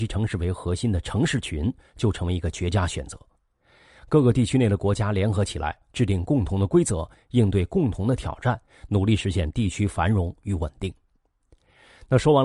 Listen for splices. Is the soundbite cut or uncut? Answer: cut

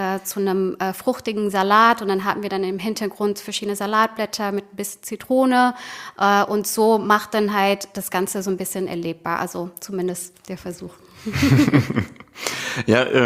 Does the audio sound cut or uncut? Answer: uncut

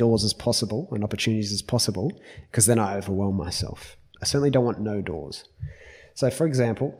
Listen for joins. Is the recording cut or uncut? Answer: cut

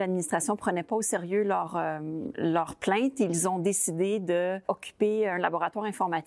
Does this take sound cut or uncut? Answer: uncut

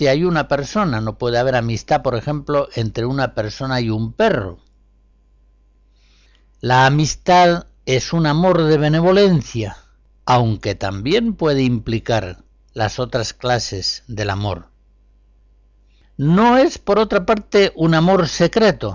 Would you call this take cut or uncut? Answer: uncut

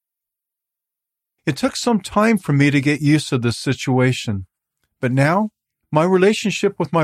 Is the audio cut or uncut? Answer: cut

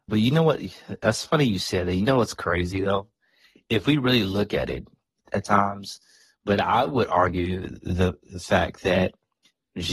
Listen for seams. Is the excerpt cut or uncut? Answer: cut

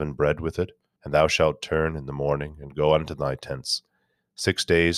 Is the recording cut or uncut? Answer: cut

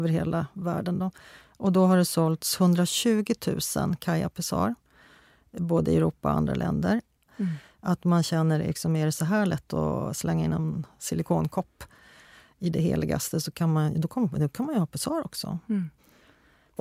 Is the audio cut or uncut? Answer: cut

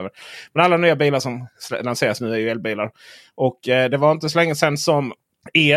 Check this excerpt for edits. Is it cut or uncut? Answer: uncut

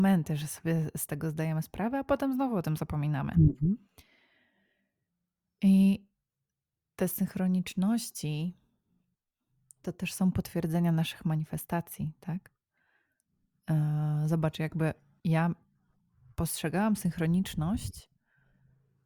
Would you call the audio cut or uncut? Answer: uncut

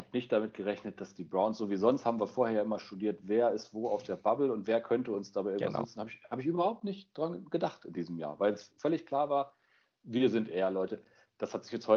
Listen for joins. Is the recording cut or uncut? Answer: uncut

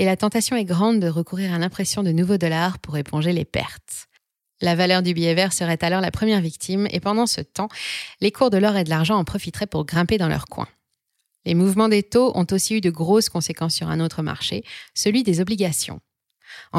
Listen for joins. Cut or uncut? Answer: uncut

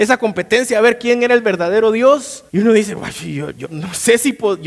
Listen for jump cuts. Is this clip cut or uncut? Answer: cut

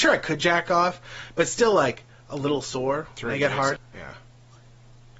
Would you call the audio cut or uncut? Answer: cut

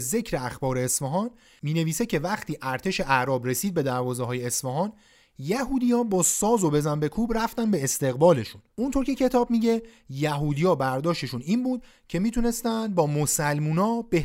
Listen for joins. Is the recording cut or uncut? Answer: cut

